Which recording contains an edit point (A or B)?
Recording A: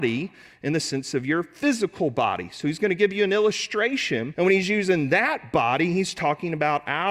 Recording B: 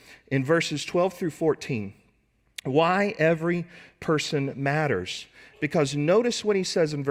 A